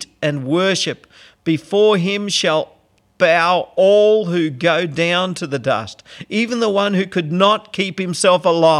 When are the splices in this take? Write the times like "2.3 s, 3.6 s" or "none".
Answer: none